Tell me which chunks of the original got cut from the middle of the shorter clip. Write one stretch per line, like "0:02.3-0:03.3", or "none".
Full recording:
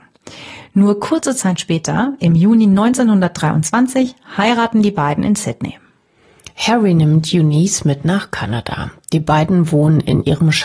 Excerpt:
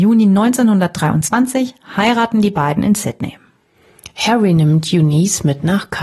none